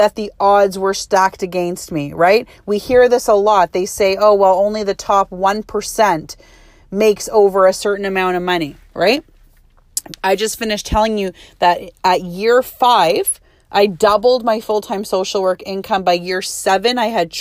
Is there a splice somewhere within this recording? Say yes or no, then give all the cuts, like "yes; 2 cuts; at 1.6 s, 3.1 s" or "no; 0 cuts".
no; 0 cuts